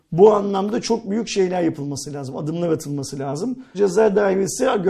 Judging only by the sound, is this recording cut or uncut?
cut